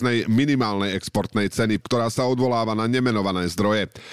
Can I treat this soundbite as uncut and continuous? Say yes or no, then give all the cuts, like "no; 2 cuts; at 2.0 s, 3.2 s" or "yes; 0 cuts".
no; 1 cut; at 1.8 s